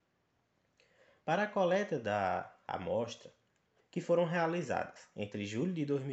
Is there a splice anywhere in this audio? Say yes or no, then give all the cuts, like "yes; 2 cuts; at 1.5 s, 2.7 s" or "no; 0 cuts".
yes; 1 cut; at 3.8 s